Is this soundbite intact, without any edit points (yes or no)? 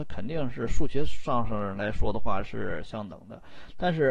yes